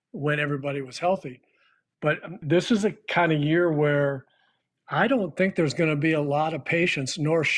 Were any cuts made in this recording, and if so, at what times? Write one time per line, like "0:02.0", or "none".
0:02.4